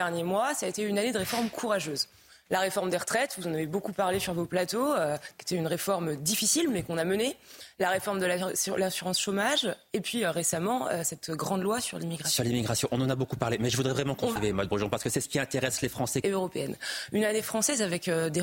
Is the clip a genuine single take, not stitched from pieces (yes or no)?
no